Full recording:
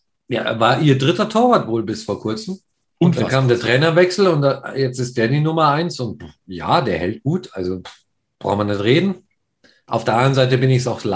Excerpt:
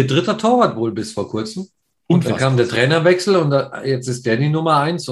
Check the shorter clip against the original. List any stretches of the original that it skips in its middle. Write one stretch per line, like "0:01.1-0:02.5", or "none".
none